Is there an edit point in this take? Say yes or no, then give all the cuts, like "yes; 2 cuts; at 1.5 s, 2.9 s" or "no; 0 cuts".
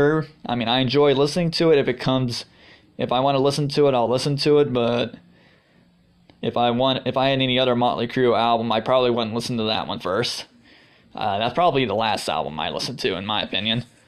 no; 0 cuts